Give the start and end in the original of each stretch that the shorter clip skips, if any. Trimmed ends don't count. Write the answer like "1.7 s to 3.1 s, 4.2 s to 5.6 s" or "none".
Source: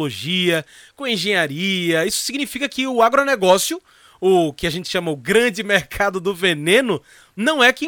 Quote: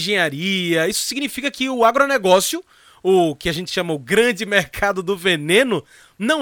none